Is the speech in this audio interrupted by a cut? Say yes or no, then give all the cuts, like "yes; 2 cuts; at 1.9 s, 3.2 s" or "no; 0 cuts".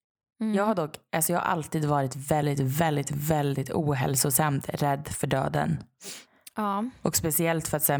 no; 0 cuts